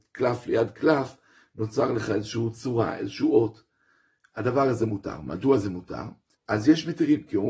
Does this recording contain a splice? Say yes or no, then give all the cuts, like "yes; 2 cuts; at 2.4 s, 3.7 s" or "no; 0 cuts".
yes; 1 cut; at 6.3 s